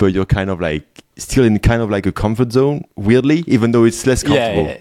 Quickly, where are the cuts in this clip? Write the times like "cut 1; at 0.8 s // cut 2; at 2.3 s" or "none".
none